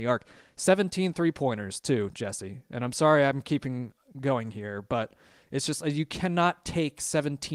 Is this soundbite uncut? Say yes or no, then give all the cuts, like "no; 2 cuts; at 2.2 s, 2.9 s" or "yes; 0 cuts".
yes; 0 cuts